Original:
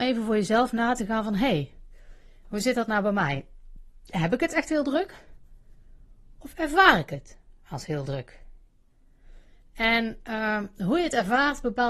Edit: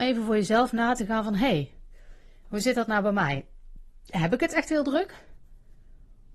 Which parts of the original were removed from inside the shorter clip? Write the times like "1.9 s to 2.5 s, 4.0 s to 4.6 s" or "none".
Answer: none